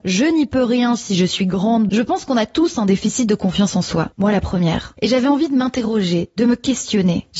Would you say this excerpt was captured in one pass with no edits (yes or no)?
no